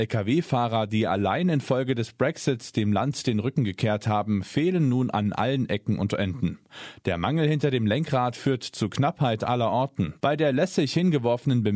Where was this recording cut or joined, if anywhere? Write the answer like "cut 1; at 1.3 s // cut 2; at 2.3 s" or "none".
cut 1; at 10.2 s